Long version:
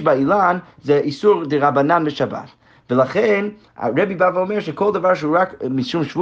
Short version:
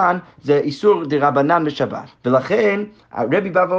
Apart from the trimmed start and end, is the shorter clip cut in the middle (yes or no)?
yes